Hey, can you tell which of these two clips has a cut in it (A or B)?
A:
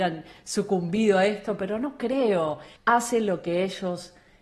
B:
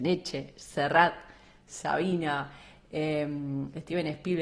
A